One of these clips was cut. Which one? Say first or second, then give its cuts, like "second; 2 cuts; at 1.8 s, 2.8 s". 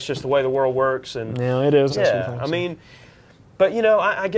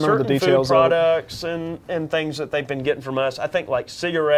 first; 1 cut; at 1.9 s